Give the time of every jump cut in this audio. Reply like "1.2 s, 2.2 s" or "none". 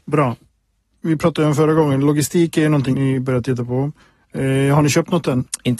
2.9 s